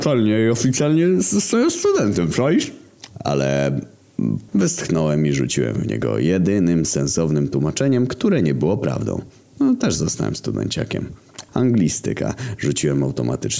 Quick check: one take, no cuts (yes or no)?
no